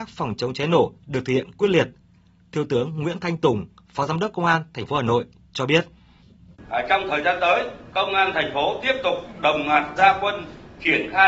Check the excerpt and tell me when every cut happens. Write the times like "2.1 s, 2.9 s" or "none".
none